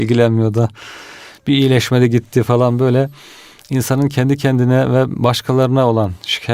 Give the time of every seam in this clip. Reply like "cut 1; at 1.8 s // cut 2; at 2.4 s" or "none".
none